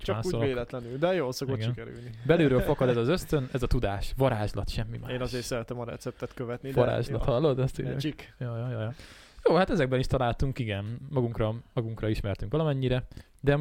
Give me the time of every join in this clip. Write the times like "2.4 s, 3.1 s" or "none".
none